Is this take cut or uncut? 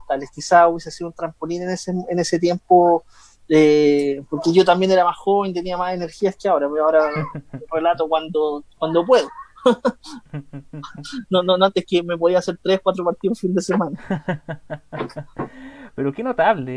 uncut